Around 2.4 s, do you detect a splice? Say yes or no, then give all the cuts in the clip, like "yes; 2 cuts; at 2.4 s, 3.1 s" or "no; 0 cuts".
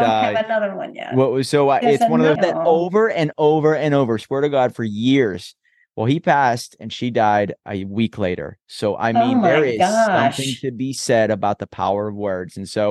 yes; 1 cut; at 2.4 s